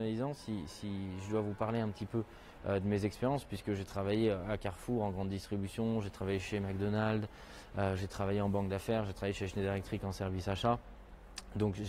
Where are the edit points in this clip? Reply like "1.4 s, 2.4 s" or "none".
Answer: none